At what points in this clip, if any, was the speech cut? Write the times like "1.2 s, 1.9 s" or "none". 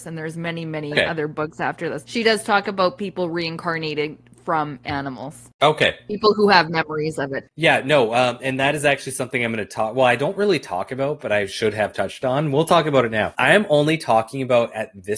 none

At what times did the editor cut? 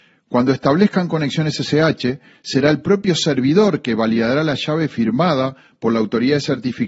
none

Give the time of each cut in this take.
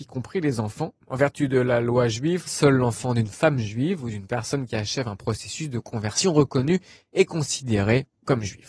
1.0 s, 2.5 s

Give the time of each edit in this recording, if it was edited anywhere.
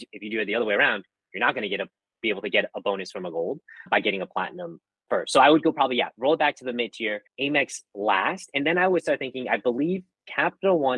7.3 s

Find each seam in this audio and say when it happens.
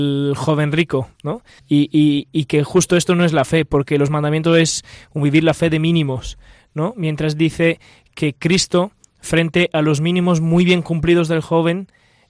1.6 s

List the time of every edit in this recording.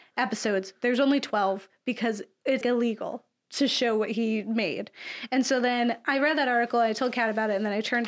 2.6 s

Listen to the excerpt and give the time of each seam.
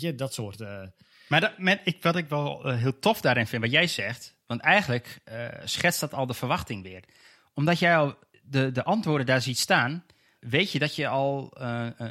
10.4 s

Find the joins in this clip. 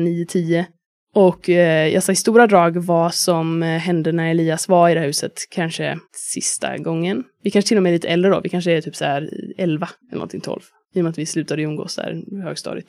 6.1 s, 10.0 s

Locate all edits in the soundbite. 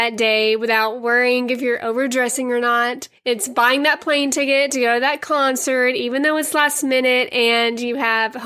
3.2 s

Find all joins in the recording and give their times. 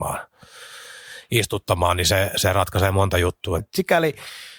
3.6 s

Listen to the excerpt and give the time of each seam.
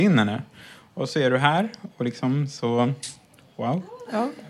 none

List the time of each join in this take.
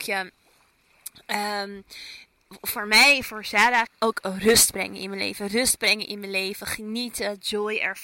3.9 s

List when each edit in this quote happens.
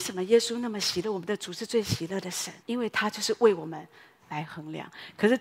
2.6 s, 4.2 s

